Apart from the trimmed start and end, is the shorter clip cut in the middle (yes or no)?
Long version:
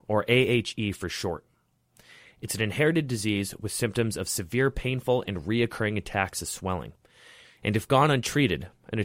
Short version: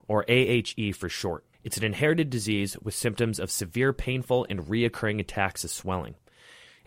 yes